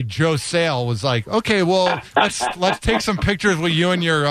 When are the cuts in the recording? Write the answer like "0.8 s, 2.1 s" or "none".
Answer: none